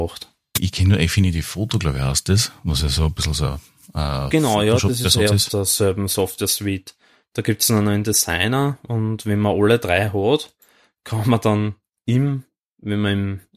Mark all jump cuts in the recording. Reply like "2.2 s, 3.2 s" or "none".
none